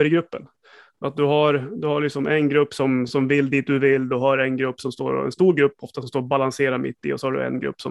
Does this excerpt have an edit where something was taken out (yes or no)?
no